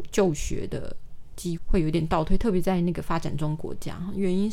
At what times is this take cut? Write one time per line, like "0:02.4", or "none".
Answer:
0:01.6